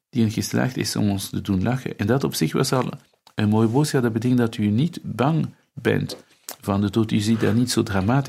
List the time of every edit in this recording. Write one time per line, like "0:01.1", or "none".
none